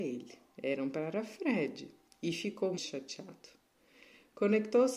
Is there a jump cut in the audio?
yes; 1 cut; at 2.8 s

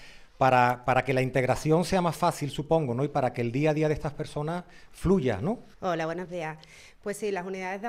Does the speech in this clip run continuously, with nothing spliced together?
no; 1 cut; at 5.7 s

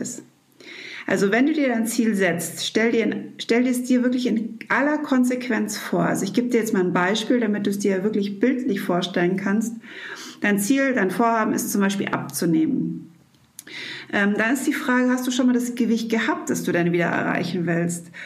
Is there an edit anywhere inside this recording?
no; 0 cuts

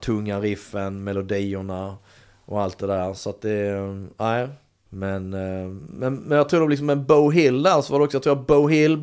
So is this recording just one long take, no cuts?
no; 1 cut; at 4.9 s

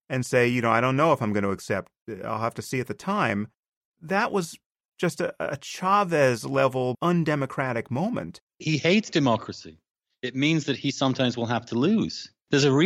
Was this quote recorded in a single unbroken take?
yes; 0 cuts

